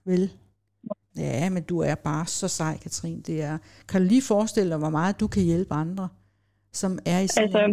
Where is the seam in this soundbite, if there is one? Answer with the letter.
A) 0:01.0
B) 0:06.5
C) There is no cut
A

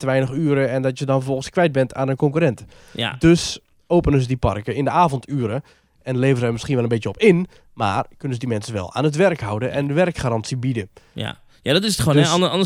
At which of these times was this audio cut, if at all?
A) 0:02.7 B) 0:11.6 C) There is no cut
C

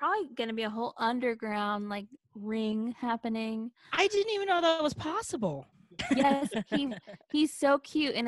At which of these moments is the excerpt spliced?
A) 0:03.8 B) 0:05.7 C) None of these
B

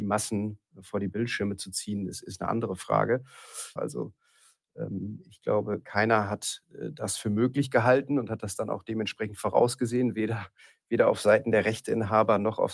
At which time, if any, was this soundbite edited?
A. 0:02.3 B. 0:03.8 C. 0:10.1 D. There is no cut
B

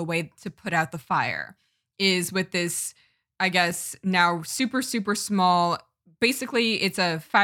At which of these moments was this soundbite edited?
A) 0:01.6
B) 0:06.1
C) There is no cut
C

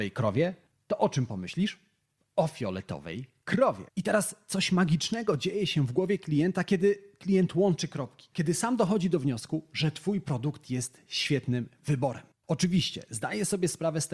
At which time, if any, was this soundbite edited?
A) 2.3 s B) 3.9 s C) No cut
B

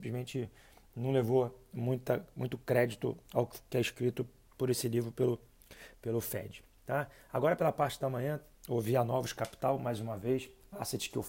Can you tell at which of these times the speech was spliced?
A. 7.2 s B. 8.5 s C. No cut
C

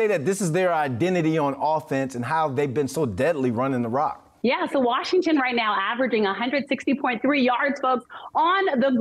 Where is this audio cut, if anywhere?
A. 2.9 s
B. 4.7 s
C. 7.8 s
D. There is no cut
D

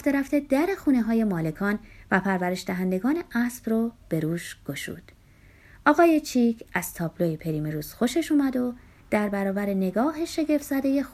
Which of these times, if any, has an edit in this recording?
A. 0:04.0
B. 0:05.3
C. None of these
C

